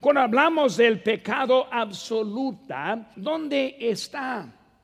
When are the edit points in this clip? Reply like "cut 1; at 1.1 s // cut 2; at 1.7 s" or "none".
cut 1; at 3.1 s